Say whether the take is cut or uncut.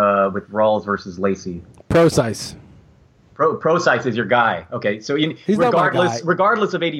uncut